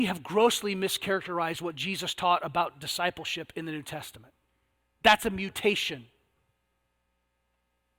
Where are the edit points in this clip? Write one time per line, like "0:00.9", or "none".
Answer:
none